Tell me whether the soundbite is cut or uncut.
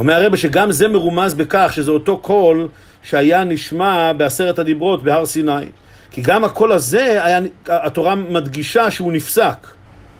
uncut